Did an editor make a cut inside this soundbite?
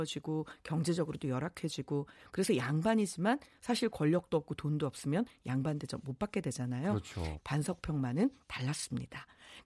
yes; 1 cut; at 7.4 s

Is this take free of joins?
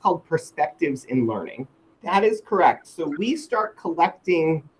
no; 2 cuts; at 1.9 s, 3.2 s

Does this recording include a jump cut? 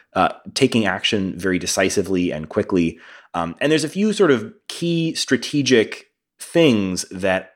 no; 0 cuts

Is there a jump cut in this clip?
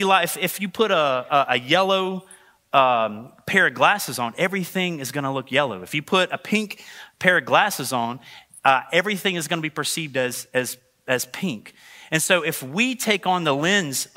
no; 0 cuts

